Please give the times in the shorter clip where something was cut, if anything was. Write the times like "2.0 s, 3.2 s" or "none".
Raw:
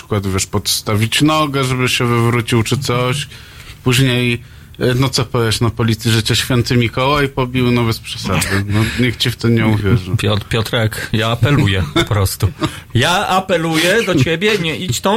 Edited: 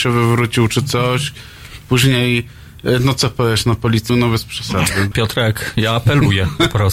4.1 s, 5.1 s